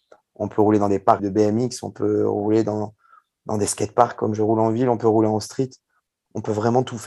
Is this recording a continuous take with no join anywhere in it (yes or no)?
no